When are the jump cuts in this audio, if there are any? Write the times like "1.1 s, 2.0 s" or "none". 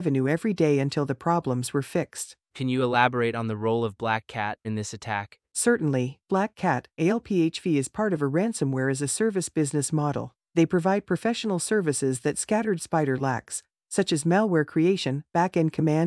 4.6 s